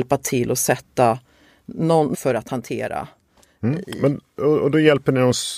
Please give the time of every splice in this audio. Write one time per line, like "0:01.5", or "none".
0:02.1